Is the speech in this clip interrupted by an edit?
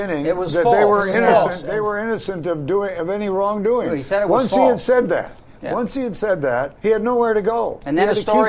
yes; 1 cut; at 6.8 s

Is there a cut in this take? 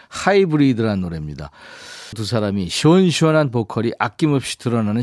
yes; 1 cut; at 2.1 s

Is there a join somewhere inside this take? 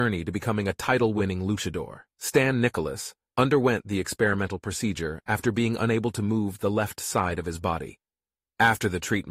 yes; 2 cuts; at 2.1 s, 3.3 s

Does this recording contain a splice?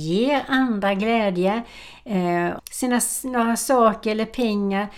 yes; 1 cut; at 2.6 s

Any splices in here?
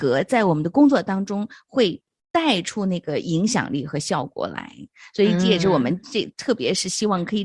no; 0 cuts

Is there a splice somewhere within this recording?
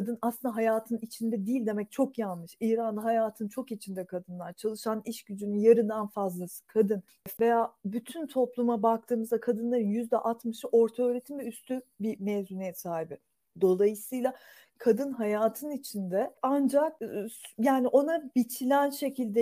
yes; 1 cut; at 7.4 s

